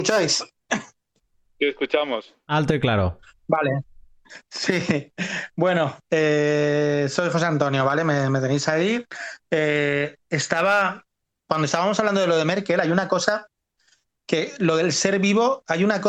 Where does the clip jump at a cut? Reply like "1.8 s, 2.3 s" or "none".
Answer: none